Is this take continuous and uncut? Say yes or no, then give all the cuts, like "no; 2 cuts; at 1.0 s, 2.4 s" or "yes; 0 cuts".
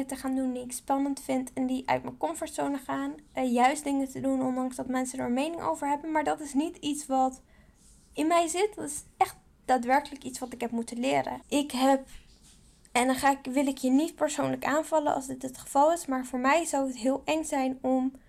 no; 1 cut; at 11.4 s